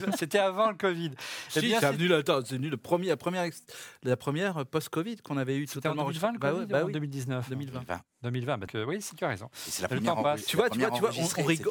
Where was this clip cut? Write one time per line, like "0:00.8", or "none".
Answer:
0:08.7